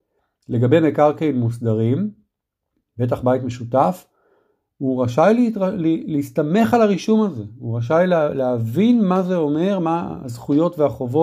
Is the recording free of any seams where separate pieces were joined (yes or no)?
yes